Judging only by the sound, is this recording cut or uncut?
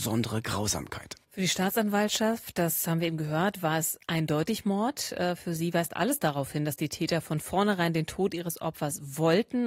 cut